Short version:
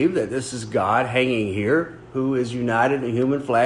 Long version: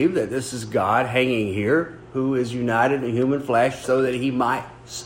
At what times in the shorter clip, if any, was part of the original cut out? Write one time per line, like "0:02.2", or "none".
none